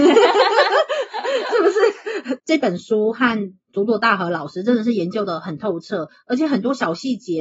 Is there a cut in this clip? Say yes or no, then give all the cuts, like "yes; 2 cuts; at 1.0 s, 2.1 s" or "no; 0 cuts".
yes; 1 cut; at 2.4 s